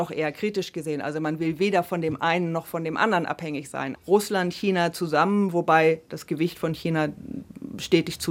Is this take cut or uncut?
cut